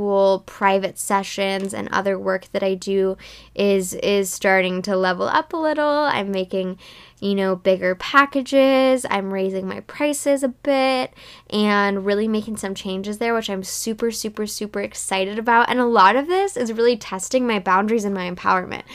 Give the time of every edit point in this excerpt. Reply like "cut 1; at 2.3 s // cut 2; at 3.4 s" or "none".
none